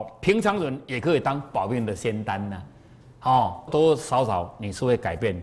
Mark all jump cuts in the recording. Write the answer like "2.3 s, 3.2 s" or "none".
3.7 s